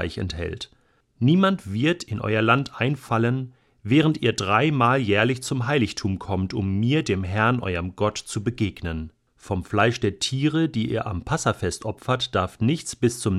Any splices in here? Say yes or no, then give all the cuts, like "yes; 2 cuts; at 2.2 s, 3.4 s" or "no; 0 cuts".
yes; 2 cuts; at 1.0 s, 9.3 s